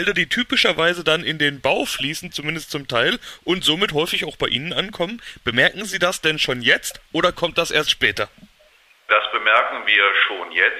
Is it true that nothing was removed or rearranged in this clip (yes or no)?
yes